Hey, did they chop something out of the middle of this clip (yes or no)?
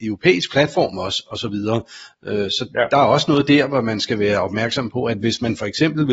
no